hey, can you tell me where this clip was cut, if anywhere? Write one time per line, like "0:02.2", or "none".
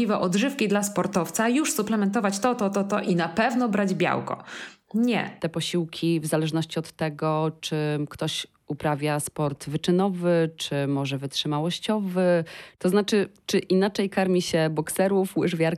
0:05.4